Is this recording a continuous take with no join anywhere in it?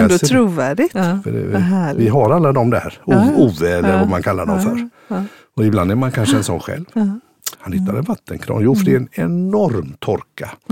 no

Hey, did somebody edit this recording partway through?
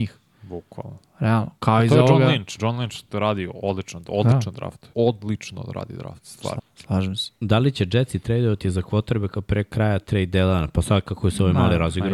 yes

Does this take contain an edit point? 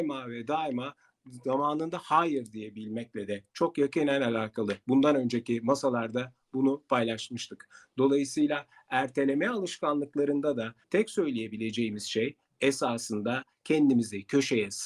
yes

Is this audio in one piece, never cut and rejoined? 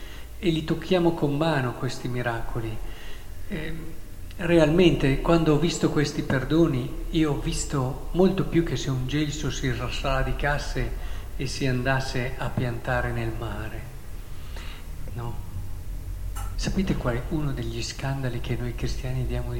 no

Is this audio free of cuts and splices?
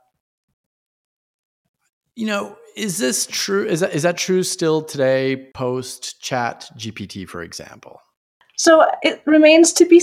yes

